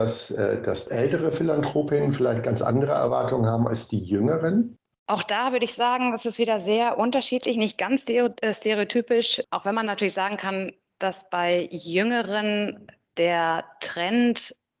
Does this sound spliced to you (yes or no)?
no